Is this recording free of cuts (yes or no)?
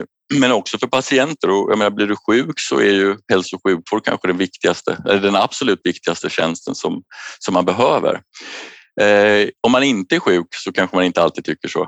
yes